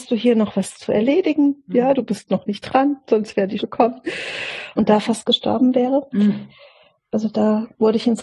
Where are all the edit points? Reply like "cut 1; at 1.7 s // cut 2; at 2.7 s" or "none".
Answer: cut 1; at 1.9 s // cut 2; at 3.6 s // cut 3; at 4.8 s